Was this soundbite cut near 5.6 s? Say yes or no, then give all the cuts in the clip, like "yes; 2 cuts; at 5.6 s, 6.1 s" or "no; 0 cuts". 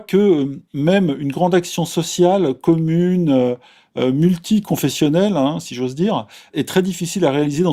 no; 0 cuts